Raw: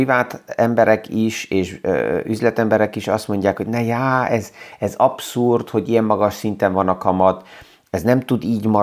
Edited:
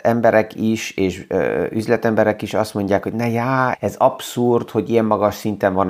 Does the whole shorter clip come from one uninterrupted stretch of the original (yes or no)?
no